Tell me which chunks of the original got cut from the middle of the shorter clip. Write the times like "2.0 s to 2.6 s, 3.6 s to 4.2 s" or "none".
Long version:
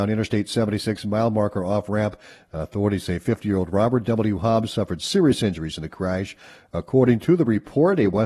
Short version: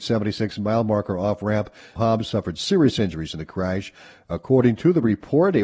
2.4 s to 4.4 s